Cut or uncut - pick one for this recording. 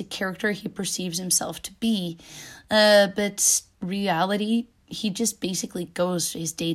cut